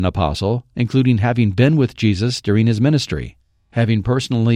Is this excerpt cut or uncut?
uncut